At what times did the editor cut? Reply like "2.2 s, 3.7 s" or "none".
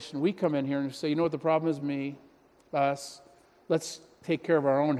none